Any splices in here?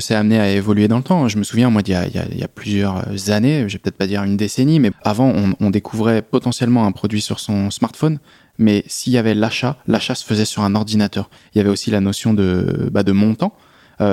yes; 2 cuts; at 4.9 s, 11.4 s

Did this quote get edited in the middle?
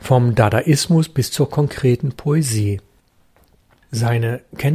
no; 0 cuts

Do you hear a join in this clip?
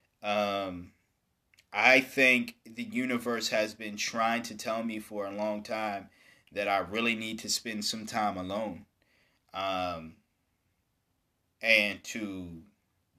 no; 0 cuts

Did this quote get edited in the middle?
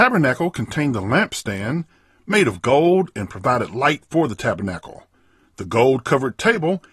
no; 0 cuts

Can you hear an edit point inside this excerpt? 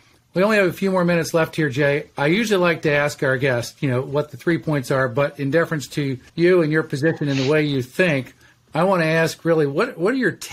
yes; 1 cut; at 6.3 s

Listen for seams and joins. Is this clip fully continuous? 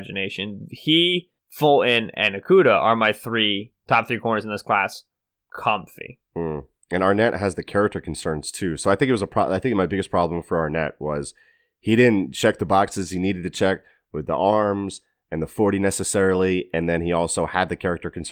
no; 1 cut; at 1.4 s

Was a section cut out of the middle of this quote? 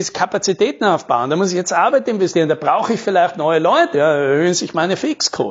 yes; 1 cut; at 3.9 s

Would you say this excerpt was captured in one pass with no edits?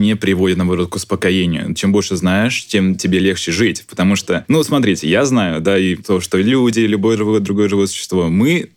yes; 0 cuts

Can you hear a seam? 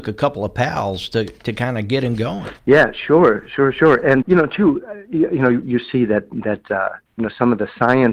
yes; 3 cuts; at 2.6 s, 4.2 s, 5.6 s

